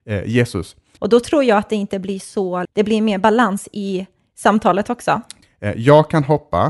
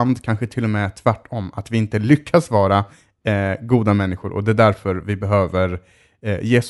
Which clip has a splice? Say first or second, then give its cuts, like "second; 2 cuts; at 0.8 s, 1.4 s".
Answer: first; 3 cuts; at 1.0 s, 2.7 s, 5.4 s